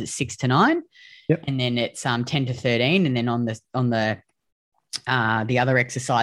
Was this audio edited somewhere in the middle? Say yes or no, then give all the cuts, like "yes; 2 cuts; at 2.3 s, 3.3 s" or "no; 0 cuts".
no; 0 cuts